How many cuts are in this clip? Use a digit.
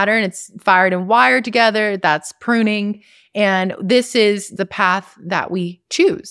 0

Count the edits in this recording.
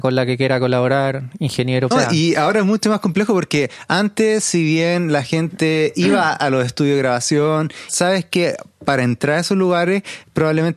2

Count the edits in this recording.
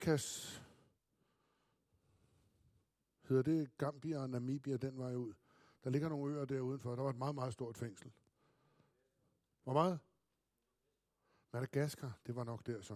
0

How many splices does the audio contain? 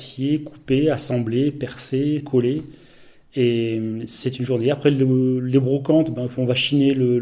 1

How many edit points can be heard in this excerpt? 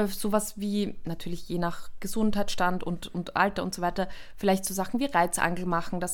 0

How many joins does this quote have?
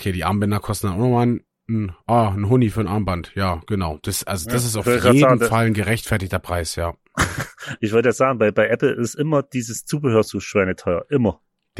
0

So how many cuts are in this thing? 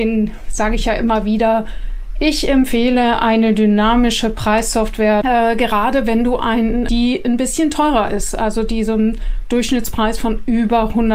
2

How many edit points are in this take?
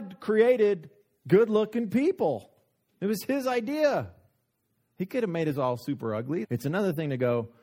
1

